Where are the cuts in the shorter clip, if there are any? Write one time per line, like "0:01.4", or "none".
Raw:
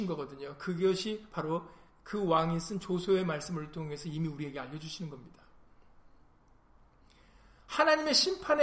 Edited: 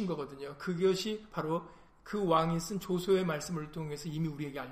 none